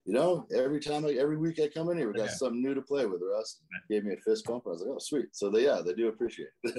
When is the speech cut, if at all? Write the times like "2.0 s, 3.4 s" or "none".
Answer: none